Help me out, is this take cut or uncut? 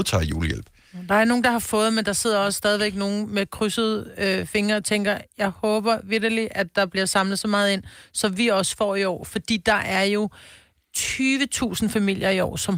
uncut